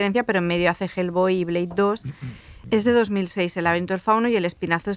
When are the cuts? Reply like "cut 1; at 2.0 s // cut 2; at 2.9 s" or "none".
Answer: cut 1; at 2.6 s